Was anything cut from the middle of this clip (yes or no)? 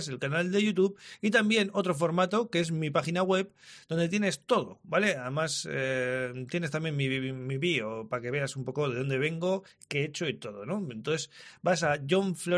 no